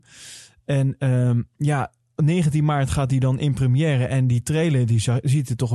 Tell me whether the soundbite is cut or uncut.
uncut